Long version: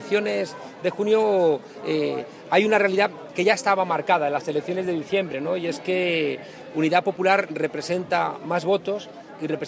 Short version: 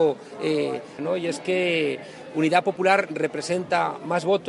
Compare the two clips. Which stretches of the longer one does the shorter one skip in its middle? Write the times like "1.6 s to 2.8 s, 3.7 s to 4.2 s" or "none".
2.4 s to 5.4 s

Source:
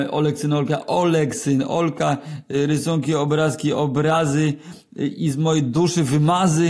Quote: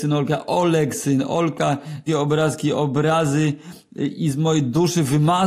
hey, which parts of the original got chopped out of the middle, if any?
2.5 s to 3.1 s

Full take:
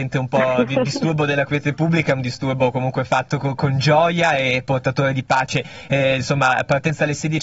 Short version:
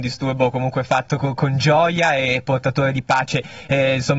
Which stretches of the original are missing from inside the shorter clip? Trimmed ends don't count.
none

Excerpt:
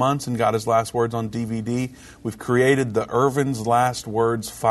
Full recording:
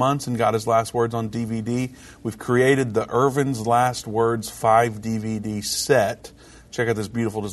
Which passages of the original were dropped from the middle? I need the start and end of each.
none

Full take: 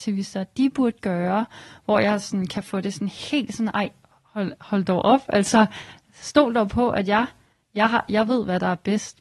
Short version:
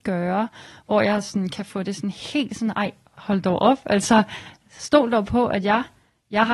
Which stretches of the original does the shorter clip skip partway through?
4.1 s to 4.6 s

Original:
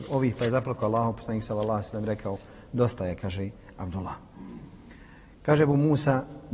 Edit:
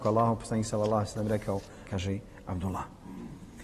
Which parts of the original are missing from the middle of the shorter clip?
2.6 s to 3.2 s

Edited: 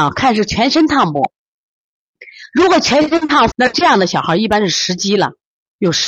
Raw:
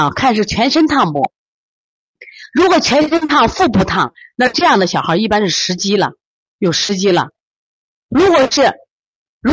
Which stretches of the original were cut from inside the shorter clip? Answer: 3.5 s to 4.3 s

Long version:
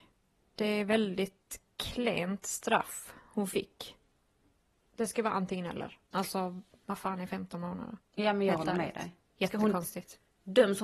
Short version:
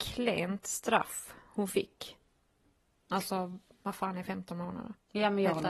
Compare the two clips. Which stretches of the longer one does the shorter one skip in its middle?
4.8 s to 6.1 s

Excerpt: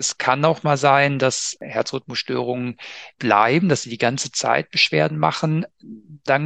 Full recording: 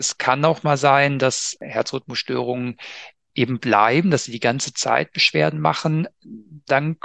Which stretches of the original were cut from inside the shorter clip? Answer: 3.2 s to 3.6 s

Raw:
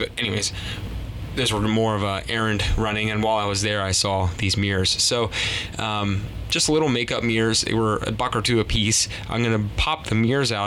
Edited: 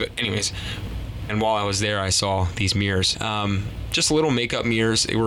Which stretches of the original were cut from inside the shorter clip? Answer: 1.3 s to 3.1 s, 5.0 s to 5.7 s

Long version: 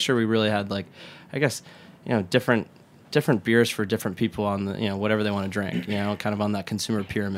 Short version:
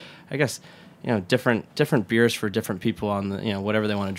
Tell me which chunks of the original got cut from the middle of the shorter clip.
2.7 s to 3.1 s

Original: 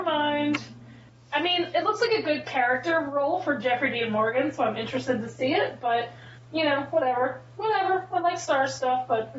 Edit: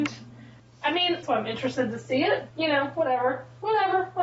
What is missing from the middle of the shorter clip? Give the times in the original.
1.7 s to 4.5 s, 5.8 s to 6.5 s

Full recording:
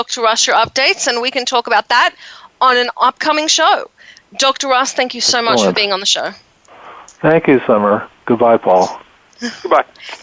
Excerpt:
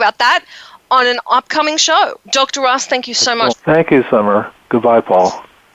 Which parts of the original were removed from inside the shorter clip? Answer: 3.9 s to 4.3 s, 5.6 s to 7.1 s

